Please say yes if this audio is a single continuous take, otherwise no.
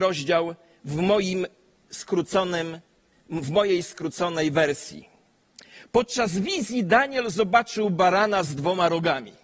yes